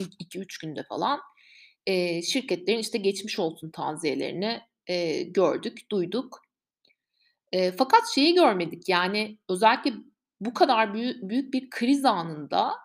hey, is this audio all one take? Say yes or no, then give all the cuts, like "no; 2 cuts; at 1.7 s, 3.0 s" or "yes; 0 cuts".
yes; 0 cuts